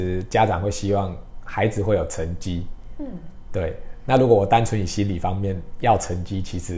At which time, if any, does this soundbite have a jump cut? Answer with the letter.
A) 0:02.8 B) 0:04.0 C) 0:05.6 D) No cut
D